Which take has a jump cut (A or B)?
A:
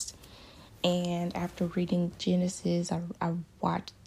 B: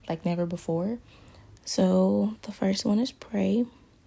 B